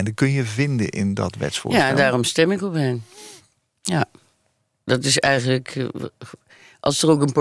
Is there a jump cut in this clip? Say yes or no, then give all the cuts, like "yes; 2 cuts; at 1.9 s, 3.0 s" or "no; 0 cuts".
no; 0 cuts